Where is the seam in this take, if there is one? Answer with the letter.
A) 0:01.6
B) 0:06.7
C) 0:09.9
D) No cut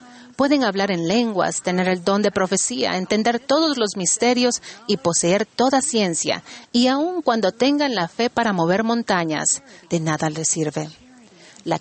C